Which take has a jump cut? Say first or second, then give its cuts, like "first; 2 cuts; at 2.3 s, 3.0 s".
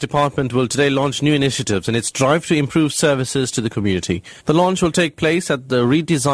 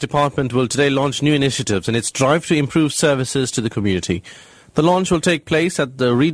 first; 1 cut; at 4.4 s